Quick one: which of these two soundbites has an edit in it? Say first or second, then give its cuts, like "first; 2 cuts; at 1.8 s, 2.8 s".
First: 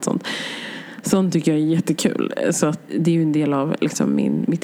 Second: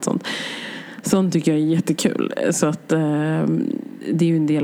first; 1 cut; at 2.9 s